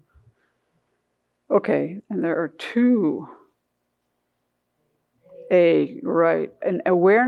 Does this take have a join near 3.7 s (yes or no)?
no